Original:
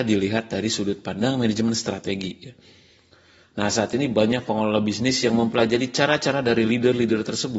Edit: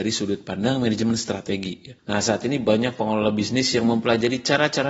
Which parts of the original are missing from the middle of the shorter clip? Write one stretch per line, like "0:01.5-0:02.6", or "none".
0:02.6-0:03.5